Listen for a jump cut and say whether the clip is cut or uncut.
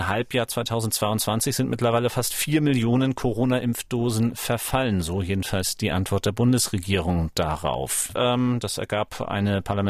cut